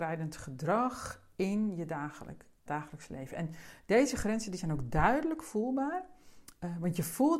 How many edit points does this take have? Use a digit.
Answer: 1